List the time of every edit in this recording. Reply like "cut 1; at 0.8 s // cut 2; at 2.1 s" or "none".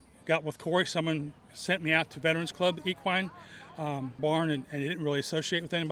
cut 1; at 4.2 s